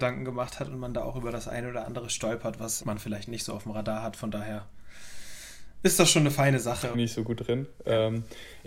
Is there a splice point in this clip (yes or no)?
yes